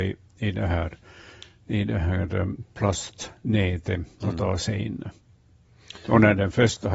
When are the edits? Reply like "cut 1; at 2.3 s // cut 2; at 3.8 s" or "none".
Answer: none